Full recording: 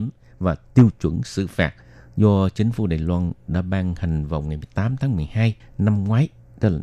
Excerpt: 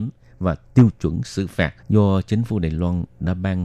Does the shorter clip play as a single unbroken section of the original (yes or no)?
no